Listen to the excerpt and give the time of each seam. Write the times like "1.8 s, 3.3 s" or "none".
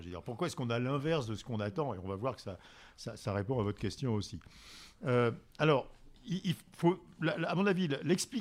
none